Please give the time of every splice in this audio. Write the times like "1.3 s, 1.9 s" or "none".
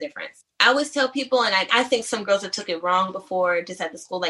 1.7 s